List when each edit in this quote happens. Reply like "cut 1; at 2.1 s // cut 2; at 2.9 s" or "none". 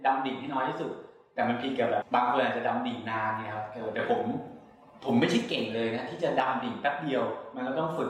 cut 1; at 2.0 s